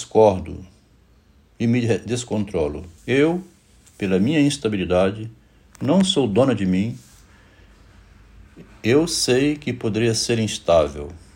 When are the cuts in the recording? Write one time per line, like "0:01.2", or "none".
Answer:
0:03.0